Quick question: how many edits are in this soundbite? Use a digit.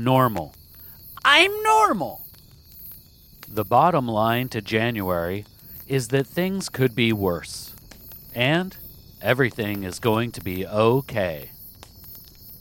1